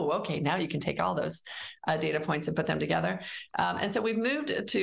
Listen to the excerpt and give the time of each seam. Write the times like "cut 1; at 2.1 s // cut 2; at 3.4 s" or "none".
none